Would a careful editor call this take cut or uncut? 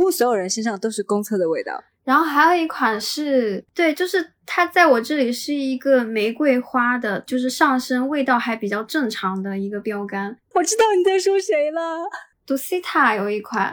cut